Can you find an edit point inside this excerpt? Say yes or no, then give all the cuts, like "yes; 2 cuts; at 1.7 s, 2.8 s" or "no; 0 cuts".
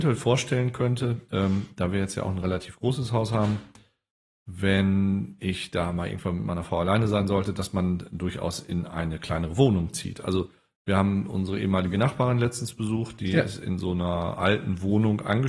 no; 0 cuts